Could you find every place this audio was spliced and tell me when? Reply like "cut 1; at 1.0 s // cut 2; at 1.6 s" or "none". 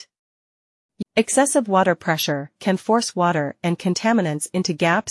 cut 1; at 1.0 s